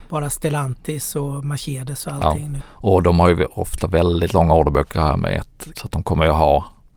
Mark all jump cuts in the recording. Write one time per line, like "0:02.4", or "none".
0:02.6
0:05.7